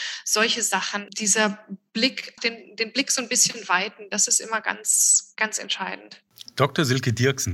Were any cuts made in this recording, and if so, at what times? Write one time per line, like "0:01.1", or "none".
0:02.4

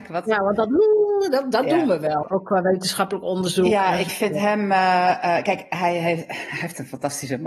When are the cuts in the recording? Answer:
0:02.2

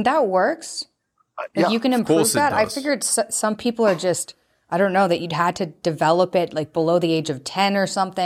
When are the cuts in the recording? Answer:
none

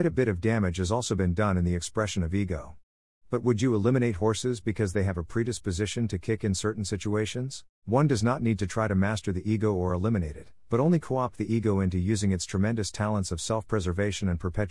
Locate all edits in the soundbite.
0:07.8

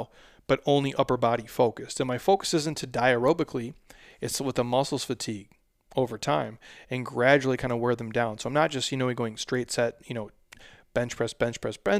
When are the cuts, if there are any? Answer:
none

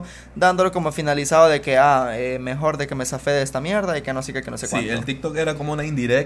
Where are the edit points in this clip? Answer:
none

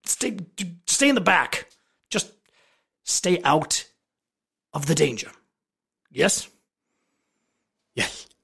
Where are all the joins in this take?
none

